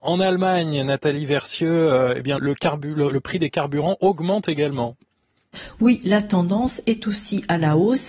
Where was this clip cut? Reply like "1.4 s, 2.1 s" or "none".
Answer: 2.4 s